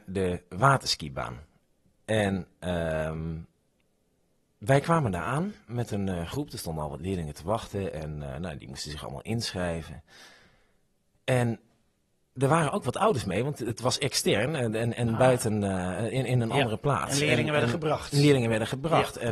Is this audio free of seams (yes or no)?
yes